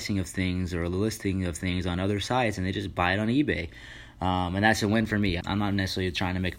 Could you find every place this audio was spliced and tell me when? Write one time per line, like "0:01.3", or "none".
0:05.4